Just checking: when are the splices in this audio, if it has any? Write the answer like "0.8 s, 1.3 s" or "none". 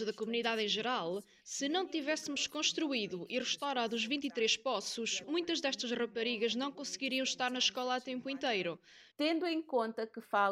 5.2 s, 9.1 s

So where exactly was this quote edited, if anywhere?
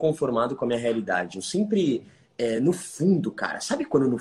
none

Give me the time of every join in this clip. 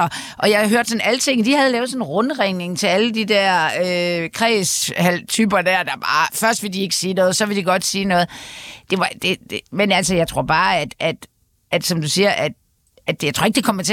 none

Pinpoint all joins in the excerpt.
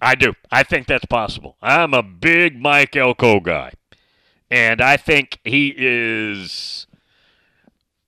none

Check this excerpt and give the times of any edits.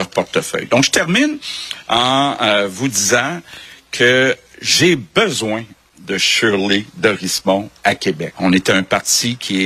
8.3 s

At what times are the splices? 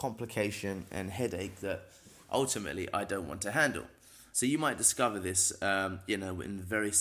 4.3 s

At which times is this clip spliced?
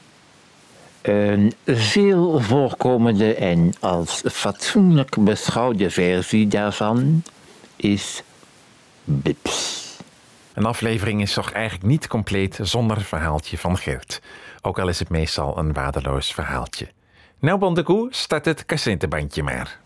10.5 s

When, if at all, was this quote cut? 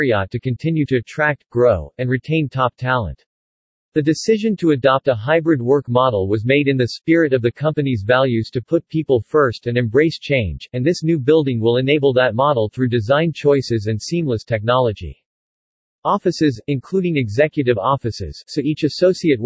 18.4 s

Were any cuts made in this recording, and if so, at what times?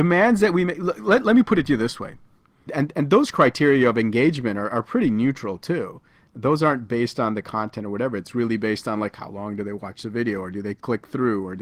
2.7 s

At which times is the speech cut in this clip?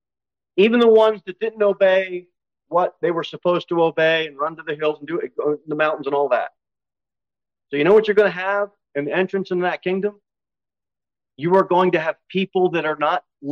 none

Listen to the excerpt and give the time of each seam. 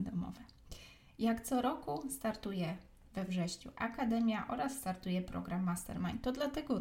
none

